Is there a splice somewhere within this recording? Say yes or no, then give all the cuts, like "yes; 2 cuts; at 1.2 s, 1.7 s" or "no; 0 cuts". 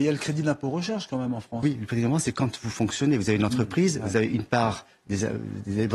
no; 0 cuts